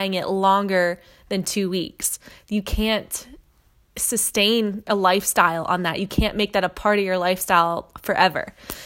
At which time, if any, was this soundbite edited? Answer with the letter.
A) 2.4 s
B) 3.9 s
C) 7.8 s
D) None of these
A